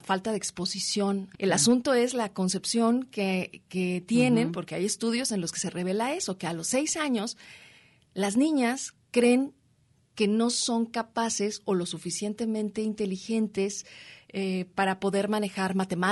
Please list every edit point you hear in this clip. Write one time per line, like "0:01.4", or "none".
0:01.3